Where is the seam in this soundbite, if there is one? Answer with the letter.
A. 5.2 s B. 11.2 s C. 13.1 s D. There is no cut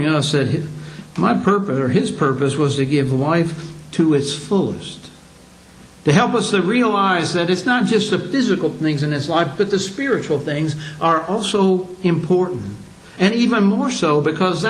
D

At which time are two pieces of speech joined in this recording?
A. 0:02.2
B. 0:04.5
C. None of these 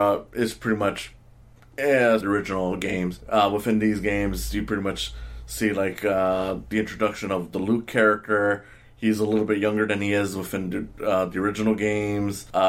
A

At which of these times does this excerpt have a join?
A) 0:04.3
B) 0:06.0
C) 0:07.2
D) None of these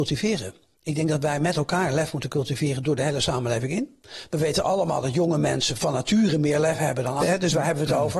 C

